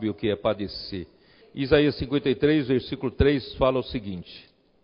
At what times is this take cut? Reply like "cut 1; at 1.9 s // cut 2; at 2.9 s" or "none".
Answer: cut 1; at 1.4 s